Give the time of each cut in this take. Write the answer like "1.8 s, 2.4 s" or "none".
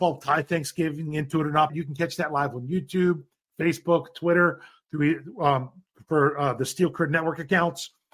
1.7 s